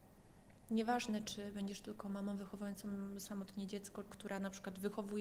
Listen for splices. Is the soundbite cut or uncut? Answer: cut